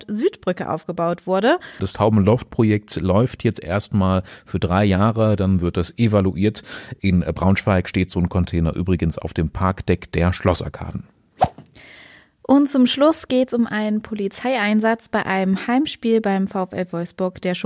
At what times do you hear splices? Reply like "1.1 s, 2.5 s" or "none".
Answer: 1.8 s